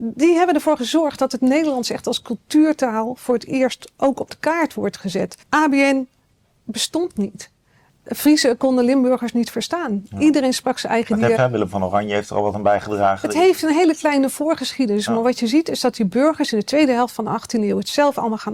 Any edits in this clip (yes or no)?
yes